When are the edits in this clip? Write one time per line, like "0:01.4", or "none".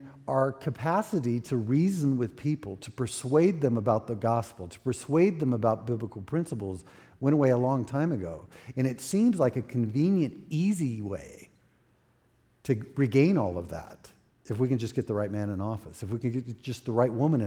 none